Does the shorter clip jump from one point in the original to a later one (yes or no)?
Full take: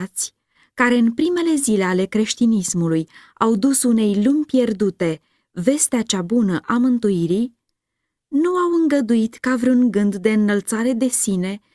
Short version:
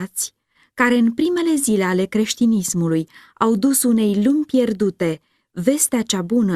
no